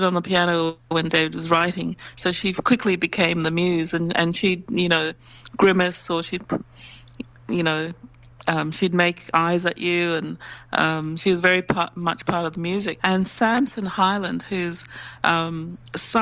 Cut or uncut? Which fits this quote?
cut